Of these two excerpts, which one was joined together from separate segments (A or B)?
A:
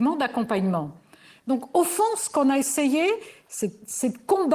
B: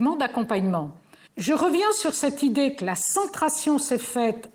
B